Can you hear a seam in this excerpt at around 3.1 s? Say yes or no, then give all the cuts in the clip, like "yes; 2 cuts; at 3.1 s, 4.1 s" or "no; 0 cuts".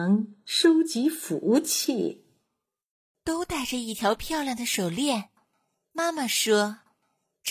yes; 1 cut; at 3.1 s